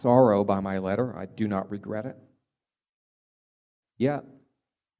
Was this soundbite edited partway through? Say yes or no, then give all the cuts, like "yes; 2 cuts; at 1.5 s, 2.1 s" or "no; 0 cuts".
yes; 1 cut; at 3.8 s